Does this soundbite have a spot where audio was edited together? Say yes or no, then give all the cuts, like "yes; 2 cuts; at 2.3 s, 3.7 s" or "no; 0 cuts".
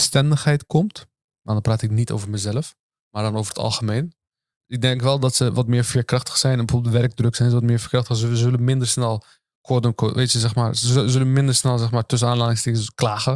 no; 0 cuts